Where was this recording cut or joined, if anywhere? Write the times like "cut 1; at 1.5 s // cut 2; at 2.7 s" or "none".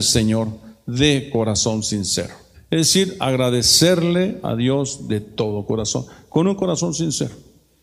cut 1; at 2.5 s